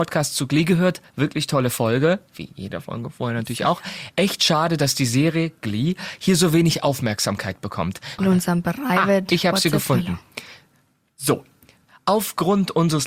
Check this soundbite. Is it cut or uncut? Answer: cut